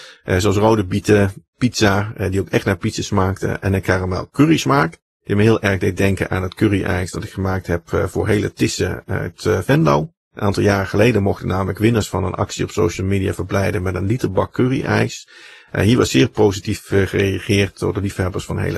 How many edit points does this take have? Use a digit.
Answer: 0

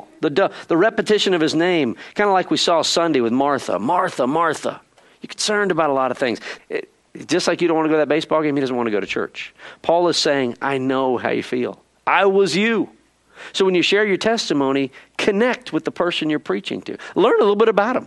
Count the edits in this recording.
1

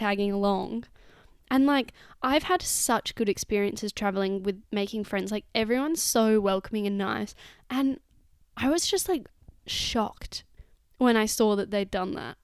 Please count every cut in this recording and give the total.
0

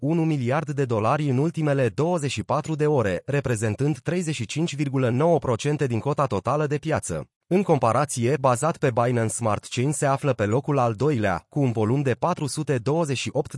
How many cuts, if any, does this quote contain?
2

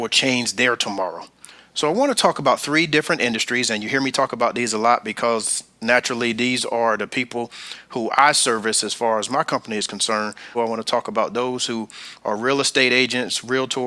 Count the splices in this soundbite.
1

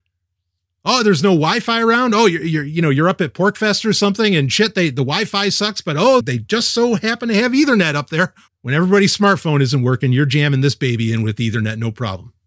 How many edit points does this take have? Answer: 2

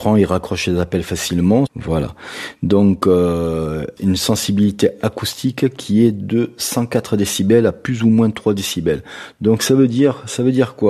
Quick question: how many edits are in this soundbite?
2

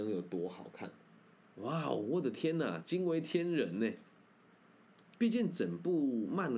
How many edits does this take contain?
2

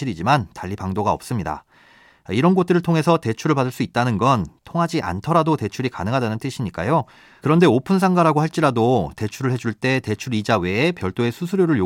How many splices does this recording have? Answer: 1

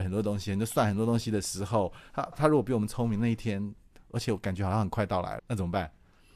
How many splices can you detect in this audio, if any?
2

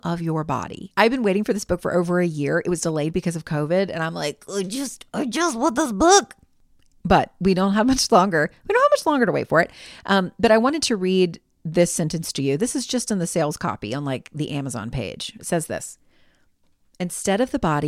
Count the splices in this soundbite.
1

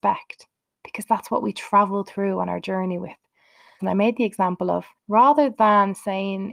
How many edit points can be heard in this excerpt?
2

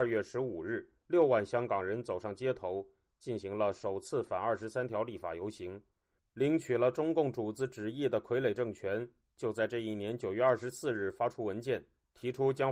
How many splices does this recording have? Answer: 2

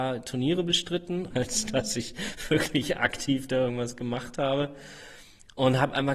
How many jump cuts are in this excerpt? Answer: 1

